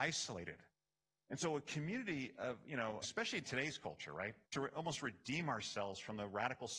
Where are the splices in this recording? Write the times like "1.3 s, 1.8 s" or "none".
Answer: 3.0 s, 4.4 s